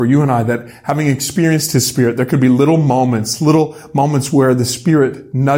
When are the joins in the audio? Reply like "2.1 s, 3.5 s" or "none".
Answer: none